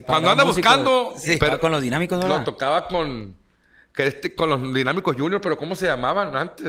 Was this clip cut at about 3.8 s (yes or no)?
no